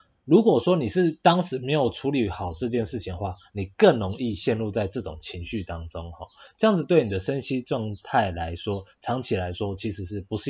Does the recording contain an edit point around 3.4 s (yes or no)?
no